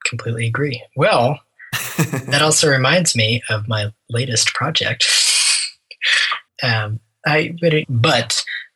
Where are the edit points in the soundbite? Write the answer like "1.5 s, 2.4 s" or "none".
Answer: 6.5 s, 7.8 s